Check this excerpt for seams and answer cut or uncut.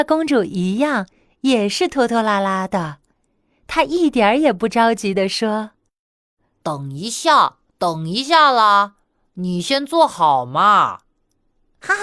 uncut